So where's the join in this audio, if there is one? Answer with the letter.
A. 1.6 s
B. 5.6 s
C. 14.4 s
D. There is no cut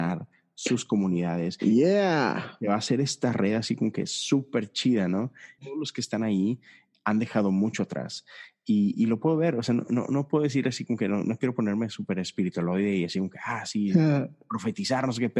B